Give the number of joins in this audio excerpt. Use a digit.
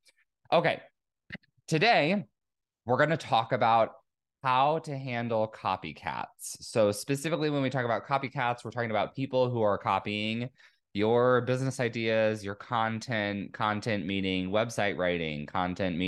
0